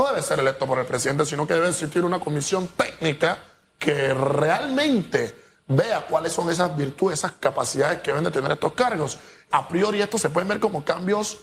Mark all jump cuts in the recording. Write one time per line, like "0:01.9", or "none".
0:09.5